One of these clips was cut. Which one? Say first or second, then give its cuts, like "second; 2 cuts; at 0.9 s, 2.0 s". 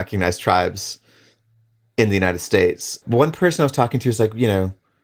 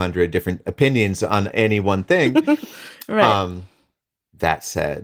first; 1 cut; at 3.0 s